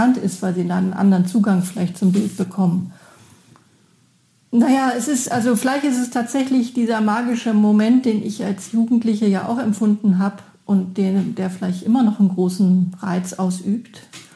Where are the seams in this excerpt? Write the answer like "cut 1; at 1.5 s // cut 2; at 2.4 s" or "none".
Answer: cut 1; at 4.4 s